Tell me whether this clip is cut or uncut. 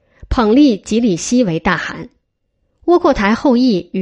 uncut